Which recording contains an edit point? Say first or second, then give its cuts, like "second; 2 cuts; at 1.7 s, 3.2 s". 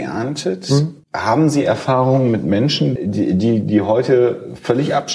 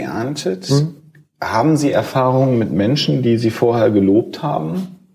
first; 2 cuts; at 1.0 s, 3.0 s